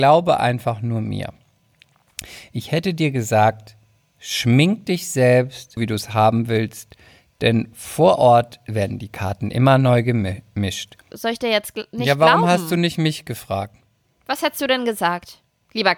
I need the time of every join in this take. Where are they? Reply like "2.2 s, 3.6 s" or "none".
5.8 s, 11.1 s

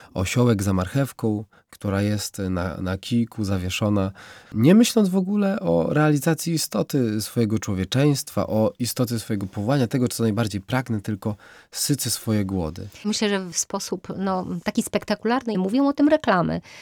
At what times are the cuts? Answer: 4.5 s, 15.5 s

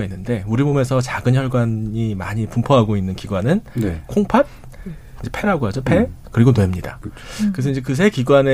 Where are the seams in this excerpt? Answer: 5.2 s

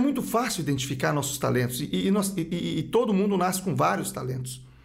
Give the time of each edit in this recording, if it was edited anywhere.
none

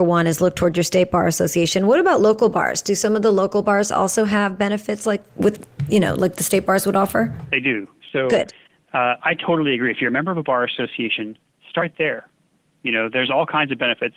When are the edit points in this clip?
none

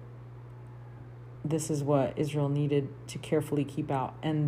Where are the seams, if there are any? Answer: none

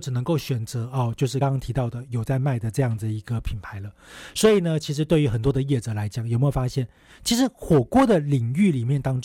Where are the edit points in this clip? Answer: 1.4 s

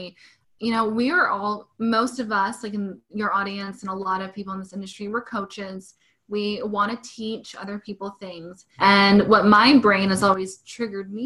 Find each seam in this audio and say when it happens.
8.8 s

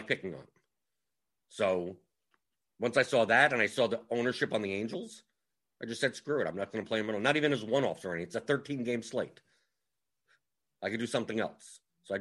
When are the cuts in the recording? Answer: none

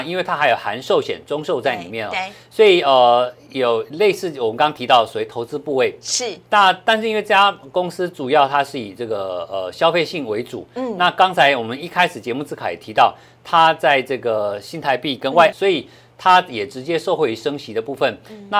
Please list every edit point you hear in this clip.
15.5 s

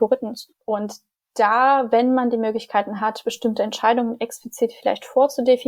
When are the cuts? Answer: none

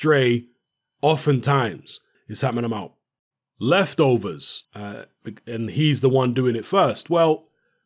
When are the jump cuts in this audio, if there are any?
2.1 s, 4.6 s

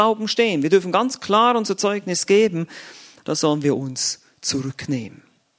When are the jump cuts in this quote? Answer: 3.2 s

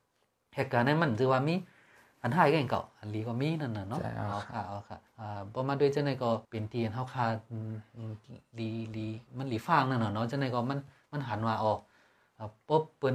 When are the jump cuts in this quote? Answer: 5.1 s, 6.4 s

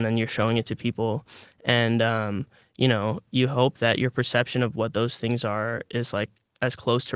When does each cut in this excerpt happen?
none

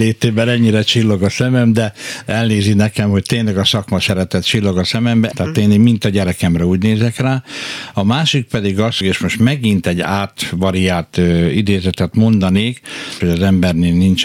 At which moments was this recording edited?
5.3 s, 9.0 s, 13.2 s

